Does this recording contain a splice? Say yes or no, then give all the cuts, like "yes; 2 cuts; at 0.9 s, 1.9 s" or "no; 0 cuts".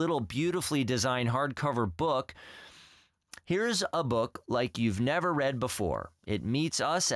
no; 0 cuts